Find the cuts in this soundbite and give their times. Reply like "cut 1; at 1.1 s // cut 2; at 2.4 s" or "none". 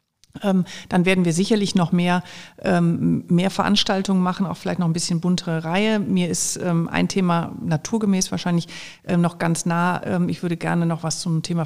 none

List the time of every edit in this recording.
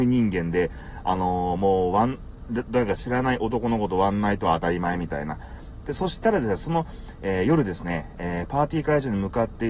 cut 1; at 5.8 s

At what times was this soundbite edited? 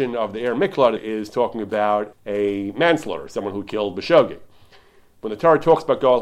cut 1; at 1.0 s // cut 2; at 2.1 s

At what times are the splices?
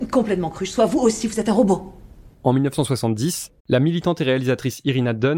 cut 1; at 2.3 s // cut 2; at 3.6 s

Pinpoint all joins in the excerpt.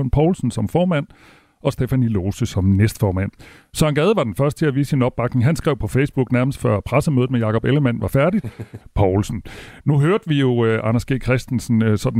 cut 1; at 8.8 s

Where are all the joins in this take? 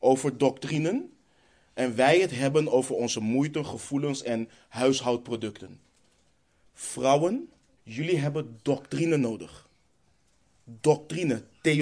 cut 1; at 7.8 s

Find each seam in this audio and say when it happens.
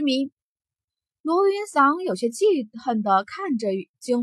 none

